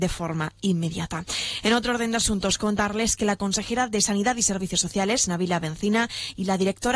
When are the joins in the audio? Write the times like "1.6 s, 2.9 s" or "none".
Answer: none